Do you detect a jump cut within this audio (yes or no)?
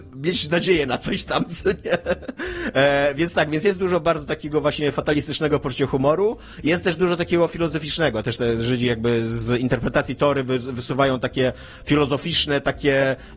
no